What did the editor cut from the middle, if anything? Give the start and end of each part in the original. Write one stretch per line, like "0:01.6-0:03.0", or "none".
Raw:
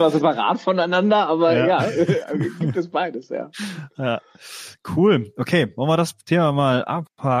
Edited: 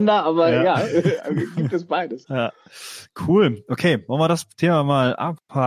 0:03.3-0:03.9